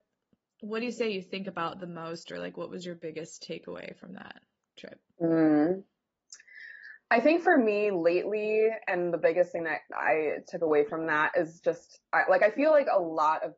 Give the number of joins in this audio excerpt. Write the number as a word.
zero